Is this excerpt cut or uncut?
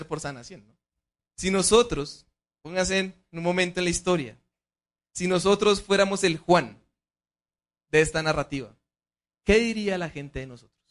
cut